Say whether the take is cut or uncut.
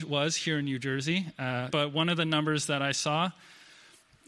cut